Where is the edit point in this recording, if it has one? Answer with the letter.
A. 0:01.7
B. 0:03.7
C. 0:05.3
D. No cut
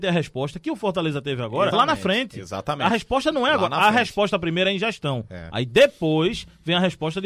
A